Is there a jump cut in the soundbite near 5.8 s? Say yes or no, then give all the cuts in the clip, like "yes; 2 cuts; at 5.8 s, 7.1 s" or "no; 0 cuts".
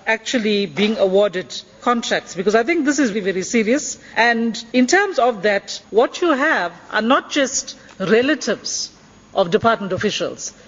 yes; 2 cuts; at 3.1 s, 5.8 s